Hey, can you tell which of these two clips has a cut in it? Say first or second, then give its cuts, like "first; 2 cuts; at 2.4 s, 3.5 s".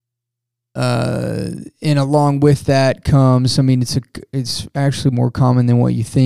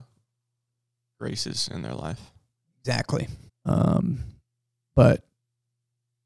second; 1 cut; at 3.5 s